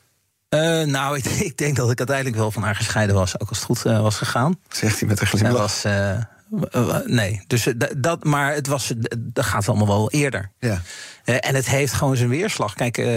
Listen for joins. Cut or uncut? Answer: uncut